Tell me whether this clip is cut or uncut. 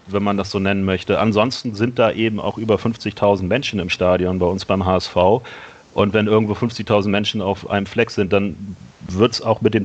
uncut